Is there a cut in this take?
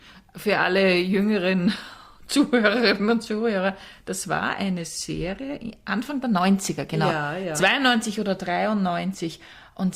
no; 0 cuts

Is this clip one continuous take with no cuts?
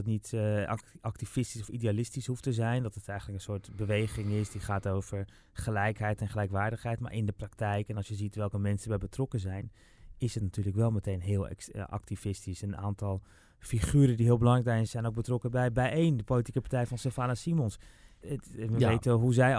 no; 2 cuts; at 14.9 s, 18.2 s

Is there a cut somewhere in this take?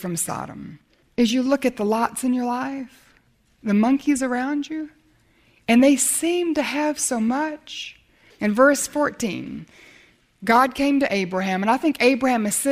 yes; 2 cuts; at 1.0 s, 8.3 s

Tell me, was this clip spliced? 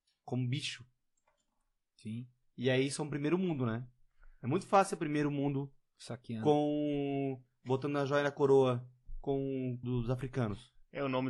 yes; 1 cut; at 9.8 s

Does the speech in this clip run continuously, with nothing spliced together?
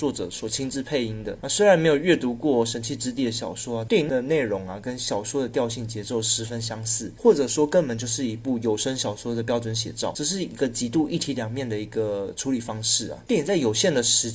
no; 1 cut; at 3.9 s

